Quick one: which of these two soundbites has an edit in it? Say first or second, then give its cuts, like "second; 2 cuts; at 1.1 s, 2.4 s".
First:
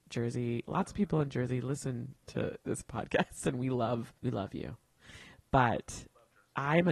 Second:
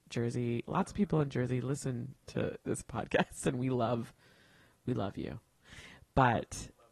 first; 1 cut; at 4.2 s